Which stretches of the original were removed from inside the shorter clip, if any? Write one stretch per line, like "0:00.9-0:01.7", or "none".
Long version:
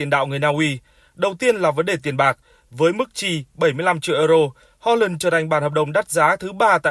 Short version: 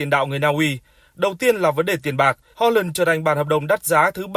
0:02.5-0:04.8